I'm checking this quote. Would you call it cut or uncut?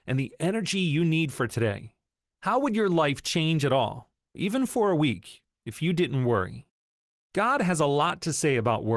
uncut